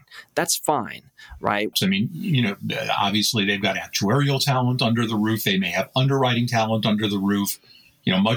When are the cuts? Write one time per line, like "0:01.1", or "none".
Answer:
0:01.7